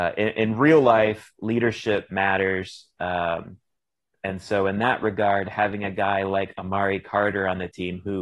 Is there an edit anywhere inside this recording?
no; 0 cuts

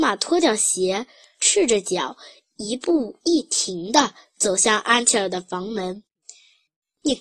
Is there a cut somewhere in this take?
no; 0 cuts

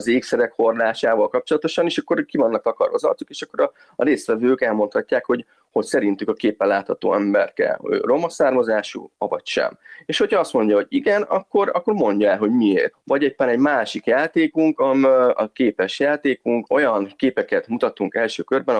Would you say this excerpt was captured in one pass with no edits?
no; 2 cuts; at 12.9 s, 16.7 s

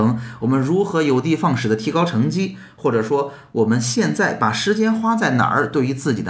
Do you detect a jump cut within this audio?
no; 0 cuts

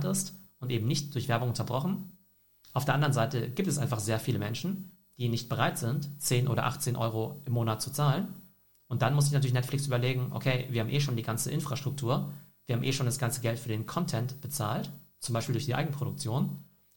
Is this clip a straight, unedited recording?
yes; 0 cuts

